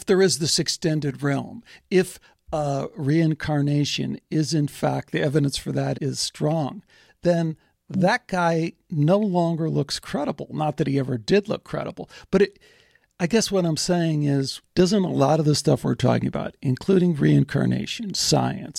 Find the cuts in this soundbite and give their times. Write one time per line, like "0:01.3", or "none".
0:05.9